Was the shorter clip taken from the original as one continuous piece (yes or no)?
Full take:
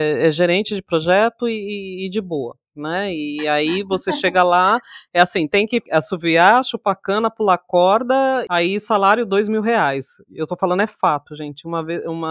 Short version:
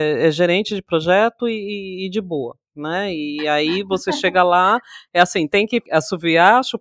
yes